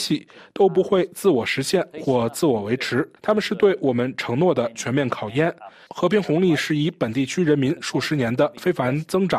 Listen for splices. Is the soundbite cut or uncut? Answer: cut